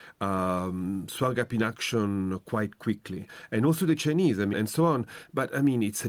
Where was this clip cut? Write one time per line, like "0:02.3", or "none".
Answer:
0:04.5